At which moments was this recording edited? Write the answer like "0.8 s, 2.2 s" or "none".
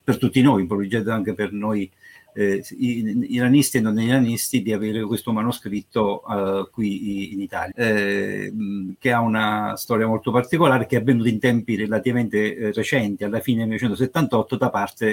7.7 s